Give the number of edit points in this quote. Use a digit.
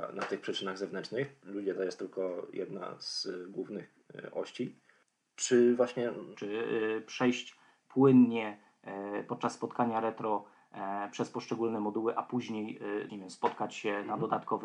2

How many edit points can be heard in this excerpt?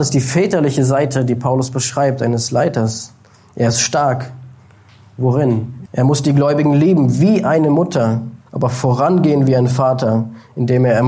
2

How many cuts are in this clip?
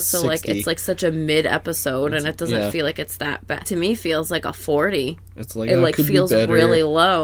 2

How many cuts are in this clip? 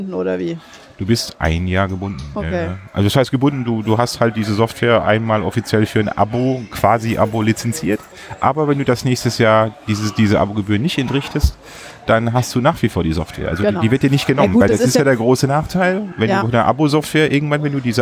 0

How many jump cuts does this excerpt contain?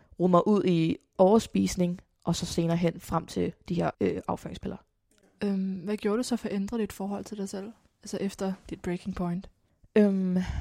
1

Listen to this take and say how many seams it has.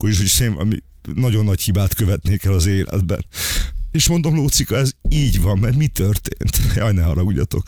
0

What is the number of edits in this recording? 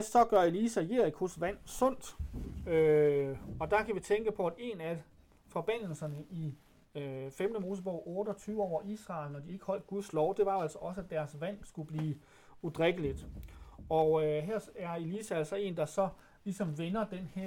0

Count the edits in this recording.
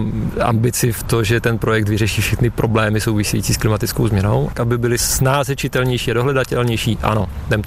1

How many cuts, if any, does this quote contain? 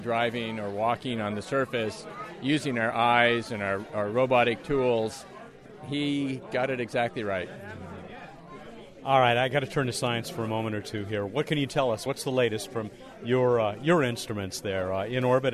0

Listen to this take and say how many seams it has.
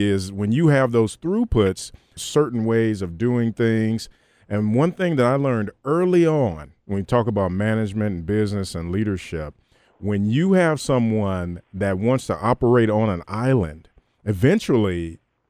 1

